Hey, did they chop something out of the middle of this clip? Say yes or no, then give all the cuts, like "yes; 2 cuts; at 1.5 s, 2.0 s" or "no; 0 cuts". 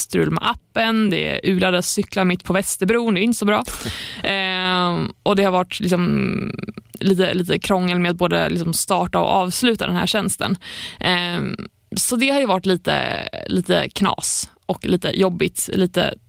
no; 0 cuts